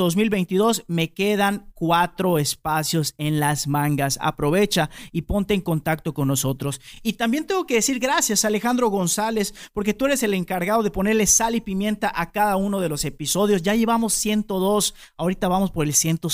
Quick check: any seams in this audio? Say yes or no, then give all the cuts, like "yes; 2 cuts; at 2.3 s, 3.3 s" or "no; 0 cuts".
no; 0 cuts